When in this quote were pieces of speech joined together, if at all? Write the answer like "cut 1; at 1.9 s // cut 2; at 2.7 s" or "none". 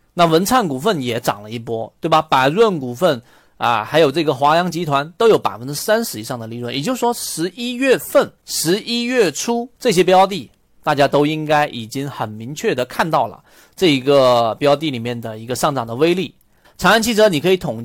cut 1; at 8.4 s // cut 2; at 9.7 s // cut 3; at 16.6 s